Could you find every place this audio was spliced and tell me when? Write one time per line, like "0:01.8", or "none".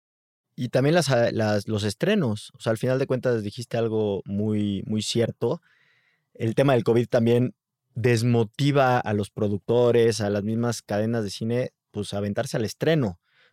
none